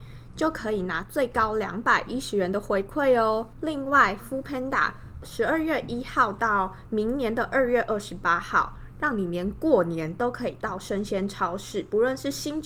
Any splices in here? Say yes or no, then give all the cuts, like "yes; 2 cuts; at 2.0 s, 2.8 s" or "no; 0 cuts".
no; 0 cuts